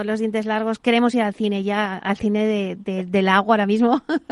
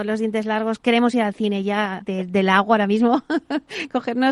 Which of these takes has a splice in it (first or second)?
second